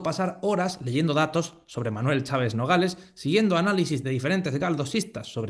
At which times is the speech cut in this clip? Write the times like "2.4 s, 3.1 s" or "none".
none